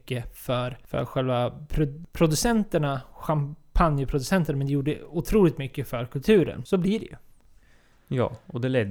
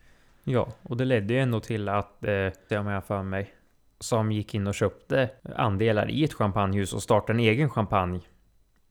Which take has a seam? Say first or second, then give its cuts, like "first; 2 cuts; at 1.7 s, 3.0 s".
second; 1 cut; at 2.7 s